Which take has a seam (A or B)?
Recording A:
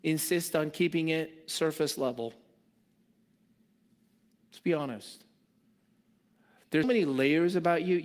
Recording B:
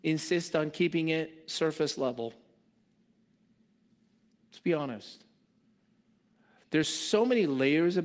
A